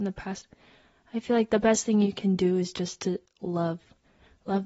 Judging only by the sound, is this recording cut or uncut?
uncut